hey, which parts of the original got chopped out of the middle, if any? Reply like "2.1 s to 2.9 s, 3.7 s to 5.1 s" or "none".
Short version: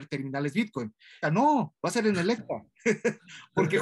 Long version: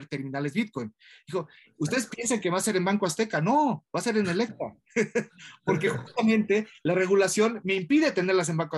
1.2 s to 3.3 s